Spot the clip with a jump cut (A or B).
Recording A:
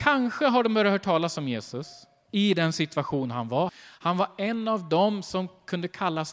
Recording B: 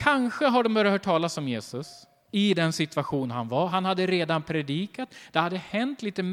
A